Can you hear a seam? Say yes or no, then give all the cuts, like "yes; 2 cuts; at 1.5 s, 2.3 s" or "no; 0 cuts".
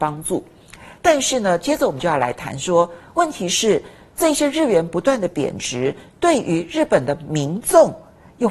no; 0 cuts